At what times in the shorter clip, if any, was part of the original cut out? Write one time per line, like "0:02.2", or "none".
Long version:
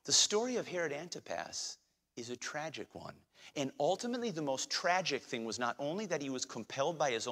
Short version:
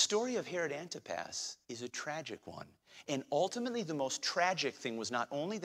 0:01.6

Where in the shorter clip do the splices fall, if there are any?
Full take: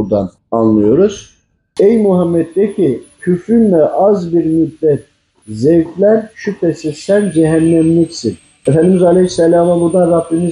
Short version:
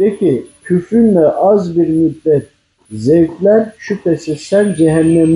none

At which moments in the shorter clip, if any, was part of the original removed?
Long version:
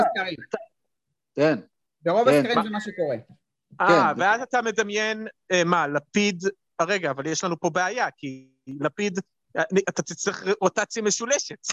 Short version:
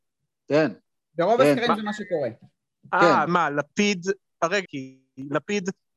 0:03.3
0:04.6

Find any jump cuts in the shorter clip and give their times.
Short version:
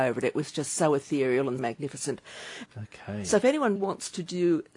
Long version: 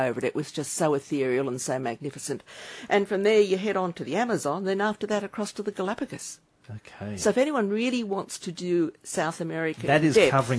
0:01.6
0:02.7
0:03.8

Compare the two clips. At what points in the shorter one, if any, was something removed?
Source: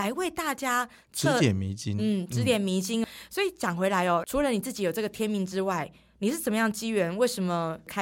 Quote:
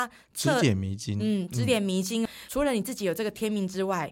0:02.5

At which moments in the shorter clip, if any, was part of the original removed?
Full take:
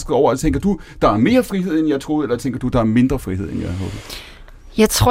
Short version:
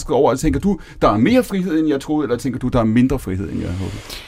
none

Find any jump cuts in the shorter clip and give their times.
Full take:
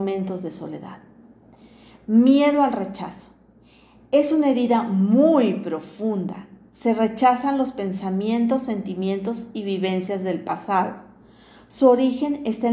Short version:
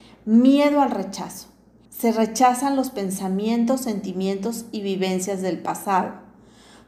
0:01.9

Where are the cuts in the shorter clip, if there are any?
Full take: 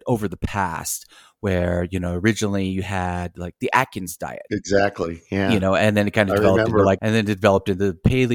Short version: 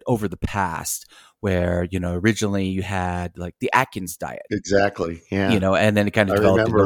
none

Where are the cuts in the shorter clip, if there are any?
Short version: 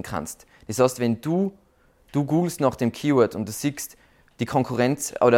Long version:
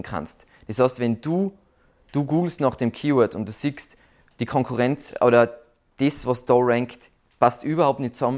none

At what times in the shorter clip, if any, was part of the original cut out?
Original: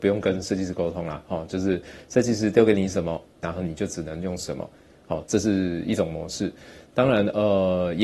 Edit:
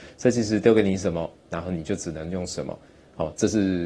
none

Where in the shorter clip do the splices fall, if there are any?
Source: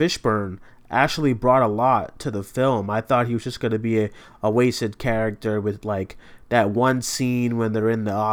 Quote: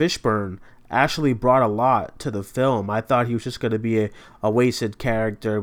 none

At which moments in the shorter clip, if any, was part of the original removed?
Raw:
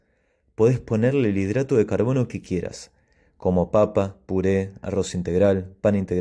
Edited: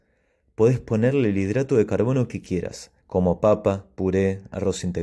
0:03.0

